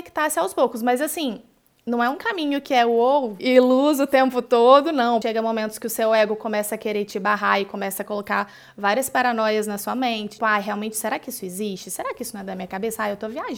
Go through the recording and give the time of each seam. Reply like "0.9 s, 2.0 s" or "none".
3.4 s, 5.2 s, 10.4 s